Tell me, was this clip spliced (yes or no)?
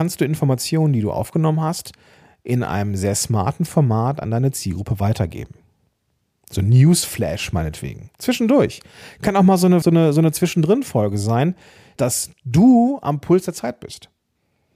yes